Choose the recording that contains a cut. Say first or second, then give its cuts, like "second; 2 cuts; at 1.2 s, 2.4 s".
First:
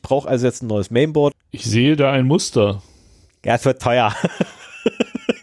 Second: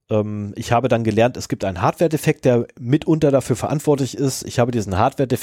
first; 1 cut; at 1.3 s